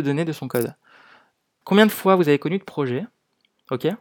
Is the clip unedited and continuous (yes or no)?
no